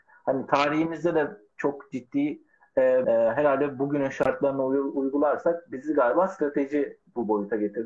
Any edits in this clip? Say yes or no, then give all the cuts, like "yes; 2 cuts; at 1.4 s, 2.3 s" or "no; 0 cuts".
yes; 1 cut; at 3.0 s